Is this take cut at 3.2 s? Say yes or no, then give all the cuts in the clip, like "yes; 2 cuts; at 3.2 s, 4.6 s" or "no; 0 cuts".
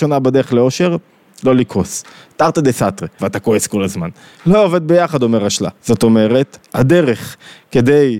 yes; 2 cuts; at 3.2 s, 5.8 s